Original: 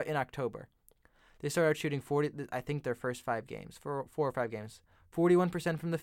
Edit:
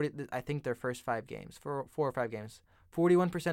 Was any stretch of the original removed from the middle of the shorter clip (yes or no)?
no